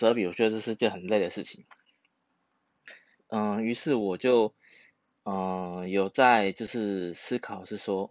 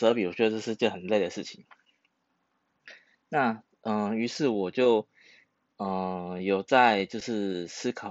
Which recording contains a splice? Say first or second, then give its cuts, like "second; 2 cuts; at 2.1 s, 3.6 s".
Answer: first; 1 cut; at 3.2 s